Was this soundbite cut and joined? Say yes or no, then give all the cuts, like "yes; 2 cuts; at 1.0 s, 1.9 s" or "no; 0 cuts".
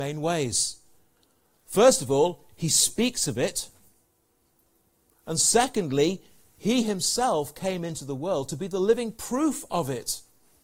no; 0 cuts